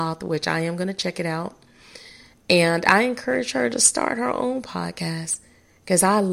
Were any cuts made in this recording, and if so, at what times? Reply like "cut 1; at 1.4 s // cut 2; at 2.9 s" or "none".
none